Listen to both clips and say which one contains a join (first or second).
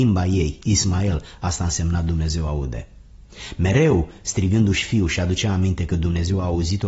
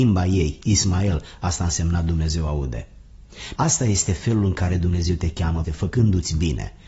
second